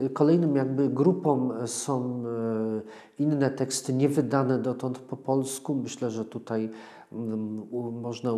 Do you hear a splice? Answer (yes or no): no